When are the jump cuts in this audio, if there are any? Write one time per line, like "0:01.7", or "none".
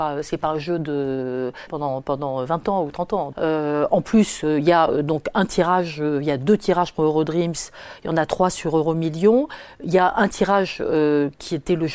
0:01.7
0:03.3